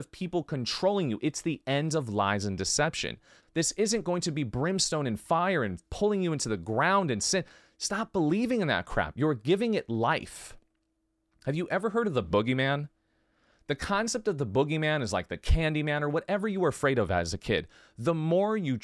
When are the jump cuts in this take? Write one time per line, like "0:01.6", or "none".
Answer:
0:03.4

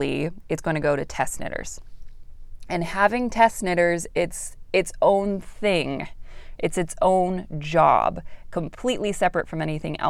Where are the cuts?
none

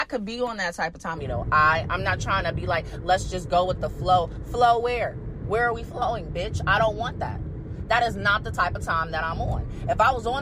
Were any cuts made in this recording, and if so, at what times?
0:01.2

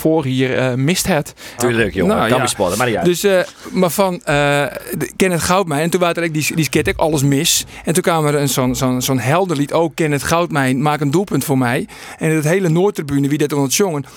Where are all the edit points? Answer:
0:01.6

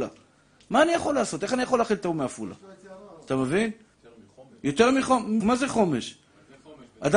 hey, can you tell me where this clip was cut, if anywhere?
0:03.9
0:05.4

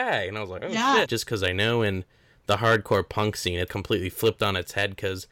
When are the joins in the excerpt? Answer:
0:01.0
0:03.7

